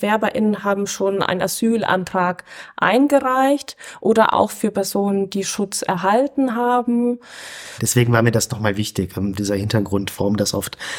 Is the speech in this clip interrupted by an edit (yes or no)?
yes